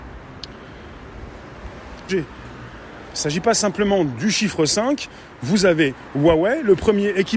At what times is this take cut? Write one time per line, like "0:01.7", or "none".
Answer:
0:02.1